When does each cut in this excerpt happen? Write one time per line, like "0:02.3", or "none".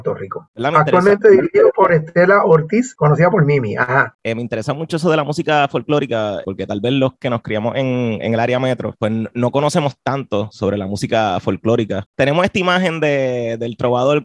none